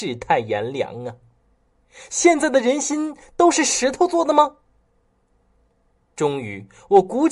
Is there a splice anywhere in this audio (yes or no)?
no